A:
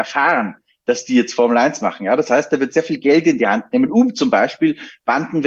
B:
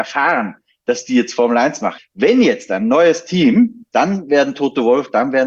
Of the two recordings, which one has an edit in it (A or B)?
B